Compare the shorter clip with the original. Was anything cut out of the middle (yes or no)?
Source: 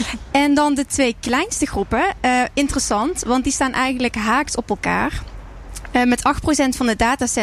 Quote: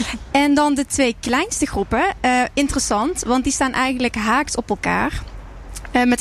no